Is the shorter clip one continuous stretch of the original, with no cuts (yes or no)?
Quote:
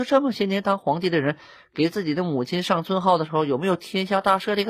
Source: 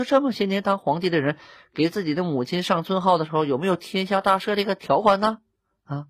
yes